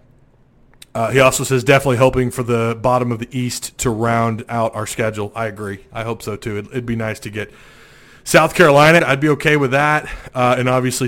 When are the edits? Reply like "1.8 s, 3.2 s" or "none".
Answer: 9.0 s